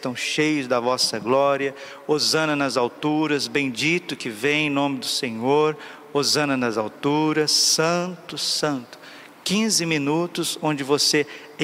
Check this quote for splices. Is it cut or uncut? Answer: cut